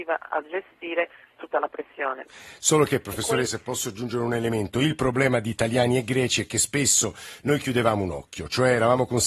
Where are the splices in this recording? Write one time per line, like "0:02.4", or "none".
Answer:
0:03.5

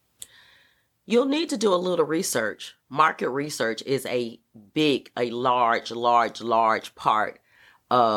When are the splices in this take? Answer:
none

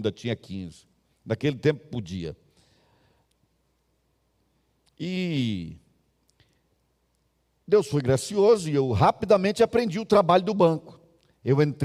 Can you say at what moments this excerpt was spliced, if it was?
none

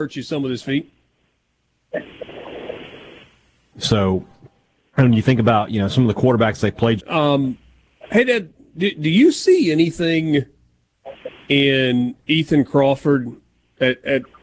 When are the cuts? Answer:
0:03.7
0:07.0

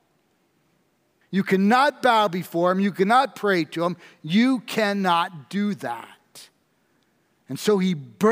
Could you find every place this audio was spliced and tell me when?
0:01.2

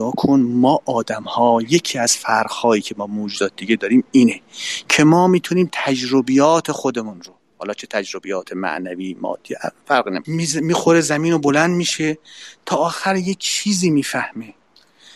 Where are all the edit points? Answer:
0:10.2

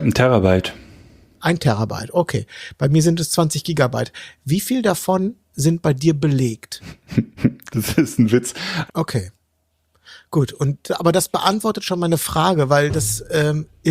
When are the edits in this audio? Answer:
0:08.9

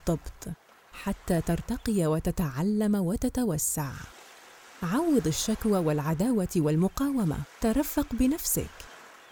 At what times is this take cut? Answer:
0:07.5

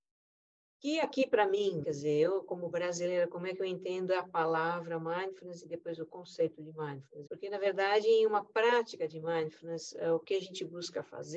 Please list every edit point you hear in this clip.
0:01.8
0:07.3

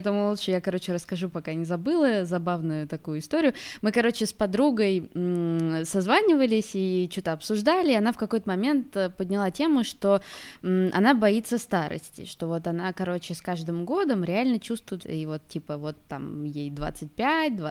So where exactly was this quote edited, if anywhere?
0:15.0

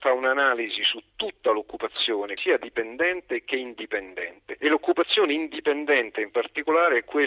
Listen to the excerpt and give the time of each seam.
0:02.4

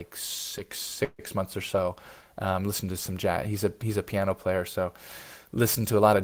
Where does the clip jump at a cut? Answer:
none

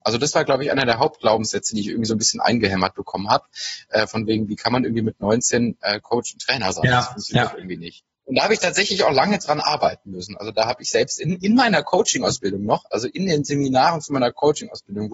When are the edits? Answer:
none

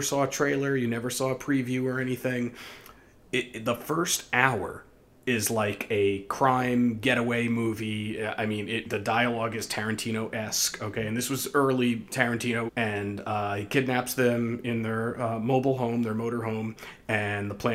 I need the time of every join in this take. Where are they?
0:08.9
0:12.7

